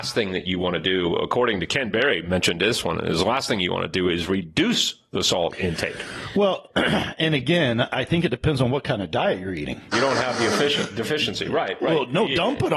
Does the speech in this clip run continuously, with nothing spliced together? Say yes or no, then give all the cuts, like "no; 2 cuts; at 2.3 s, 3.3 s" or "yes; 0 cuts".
no; 1 cut; at 9.9 s